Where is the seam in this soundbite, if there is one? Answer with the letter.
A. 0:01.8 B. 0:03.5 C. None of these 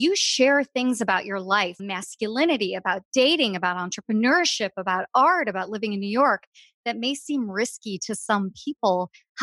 A